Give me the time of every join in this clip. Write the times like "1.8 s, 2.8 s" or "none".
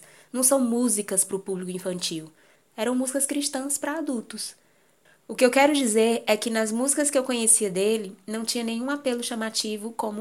none